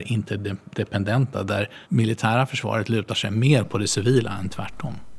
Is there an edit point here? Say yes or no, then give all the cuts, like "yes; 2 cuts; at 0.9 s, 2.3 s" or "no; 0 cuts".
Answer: yes; 1 cut; at 1.8 s